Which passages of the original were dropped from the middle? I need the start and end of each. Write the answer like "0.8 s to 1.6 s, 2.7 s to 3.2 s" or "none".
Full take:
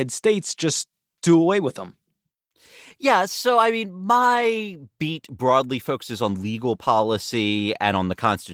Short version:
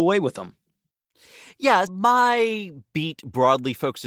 3.3 s to 3.9 s